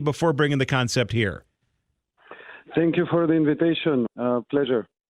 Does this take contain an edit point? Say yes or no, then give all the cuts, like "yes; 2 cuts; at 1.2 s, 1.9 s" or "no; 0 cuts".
yes; 1 cut; at 4.1 s